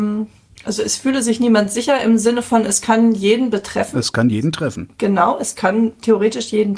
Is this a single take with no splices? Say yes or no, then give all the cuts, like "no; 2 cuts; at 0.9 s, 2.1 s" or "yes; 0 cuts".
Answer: yes; 0 cuts